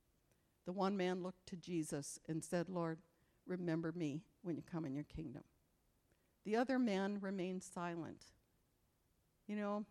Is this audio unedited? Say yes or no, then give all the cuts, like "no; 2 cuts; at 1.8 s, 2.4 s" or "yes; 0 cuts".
yes; 0 cuts